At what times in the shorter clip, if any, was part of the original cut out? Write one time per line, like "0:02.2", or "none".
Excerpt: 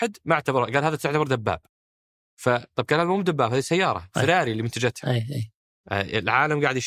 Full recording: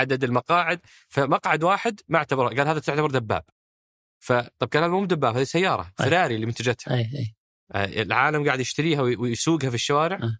none